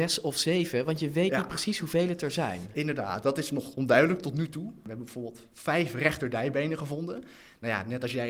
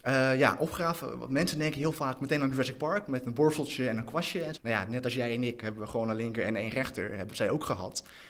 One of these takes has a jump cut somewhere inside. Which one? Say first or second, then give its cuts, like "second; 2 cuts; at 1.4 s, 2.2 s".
second; 1 cut; at 4.6 s